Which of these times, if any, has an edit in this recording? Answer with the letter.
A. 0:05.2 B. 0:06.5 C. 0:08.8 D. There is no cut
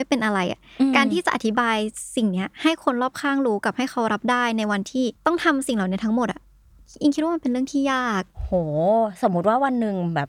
A